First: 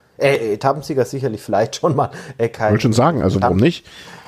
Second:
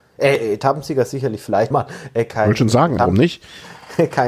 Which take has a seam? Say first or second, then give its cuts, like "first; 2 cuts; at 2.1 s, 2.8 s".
second; 2 cuts; at 1.7 s, 3.0 s